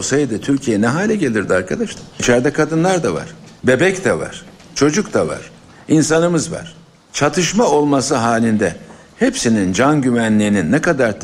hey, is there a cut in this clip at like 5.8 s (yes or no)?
no